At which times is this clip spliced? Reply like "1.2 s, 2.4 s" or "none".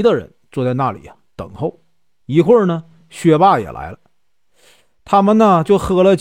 none